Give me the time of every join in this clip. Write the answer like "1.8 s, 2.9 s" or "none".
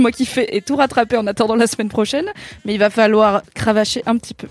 none